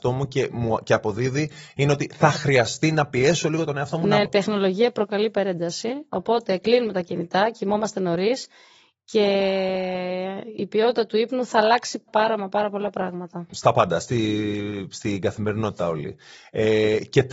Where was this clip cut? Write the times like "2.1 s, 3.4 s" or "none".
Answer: 4.2 s, 12.1 s, 13.5 s